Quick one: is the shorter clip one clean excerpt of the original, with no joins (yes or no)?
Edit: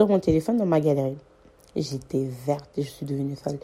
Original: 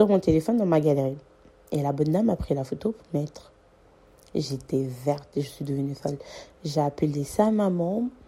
no